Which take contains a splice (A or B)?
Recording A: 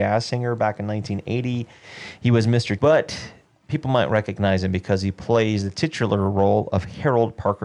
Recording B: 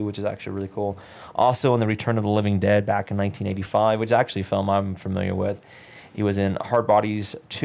A